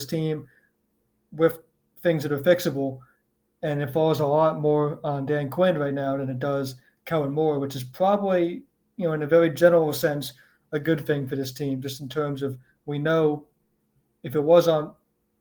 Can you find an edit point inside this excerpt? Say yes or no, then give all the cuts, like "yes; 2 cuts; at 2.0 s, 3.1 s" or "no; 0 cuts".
no; 0 cuts